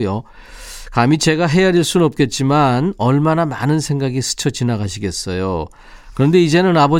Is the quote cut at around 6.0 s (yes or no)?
yes